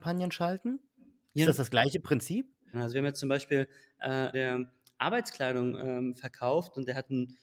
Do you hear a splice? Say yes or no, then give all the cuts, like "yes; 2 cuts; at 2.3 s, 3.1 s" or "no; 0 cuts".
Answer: yes; 2 cuts; at 2.7 s, 4.3 s